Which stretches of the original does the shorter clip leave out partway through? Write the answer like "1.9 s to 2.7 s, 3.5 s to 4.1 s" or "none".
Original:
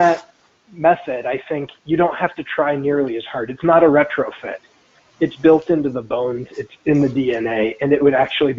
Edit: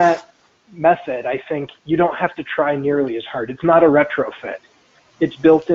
none